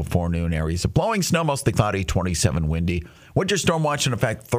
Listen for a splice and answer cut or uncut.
uncut